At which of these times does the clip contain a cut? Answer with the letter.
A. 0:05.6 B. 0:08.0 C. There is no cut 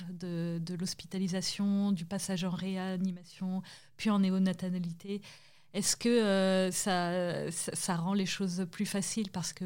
C